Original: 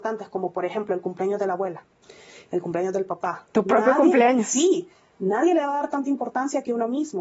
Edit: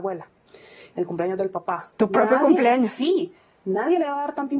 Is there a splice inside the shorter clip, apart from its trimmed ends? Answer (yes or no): no